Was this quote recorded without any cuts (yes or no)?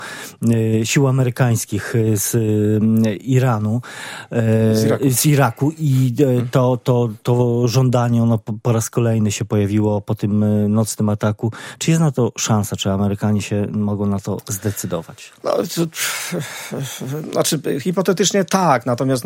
yes